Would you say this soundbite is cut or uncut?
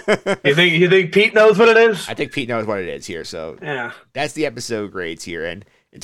uncut